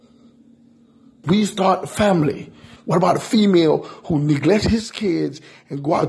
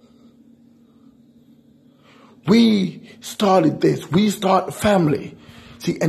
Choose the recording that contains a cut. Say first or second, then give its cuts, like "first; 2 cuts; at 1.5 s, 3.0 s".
first; 2 cuts; at 1.2 s, 2.8 s